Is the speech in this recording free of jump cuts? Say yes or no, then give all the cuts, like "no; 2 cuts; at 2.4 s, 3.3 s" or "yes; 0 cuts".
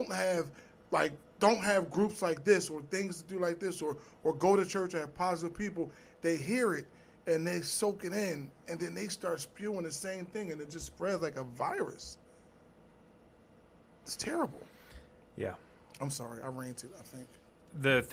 yes; 0 cuts